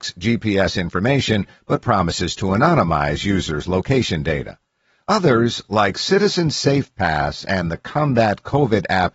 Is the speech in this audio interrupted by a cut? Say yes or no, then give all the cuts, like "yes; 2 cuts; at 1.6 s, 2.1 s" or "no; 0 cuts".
no; 0 cuts